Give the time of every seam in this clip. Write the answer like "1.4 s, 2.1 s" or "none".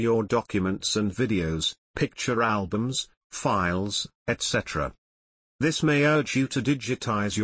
none